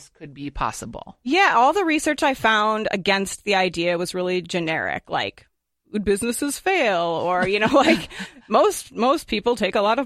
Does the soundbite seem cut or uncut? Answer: uncut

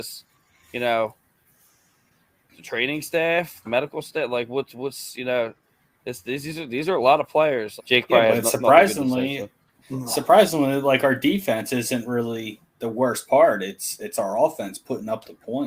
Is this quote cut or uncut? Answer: cut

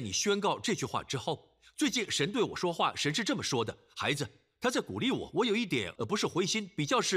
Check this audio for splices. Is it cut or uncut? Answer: cut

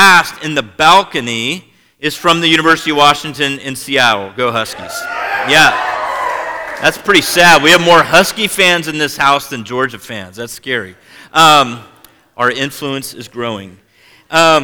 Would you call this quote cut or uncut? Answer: uncut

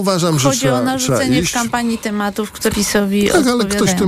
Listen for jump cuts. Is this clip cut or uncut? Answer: cut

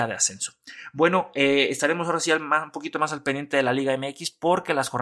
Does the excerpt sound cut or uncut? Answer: uncut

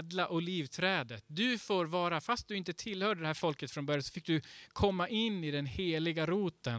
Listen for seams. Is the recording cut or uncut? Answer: uncut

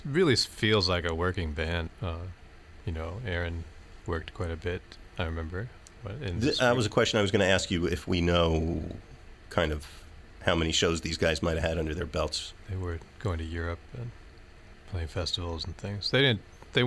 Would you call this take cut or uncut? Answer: cut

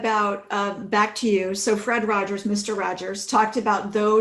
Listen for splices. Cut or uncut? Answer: uncut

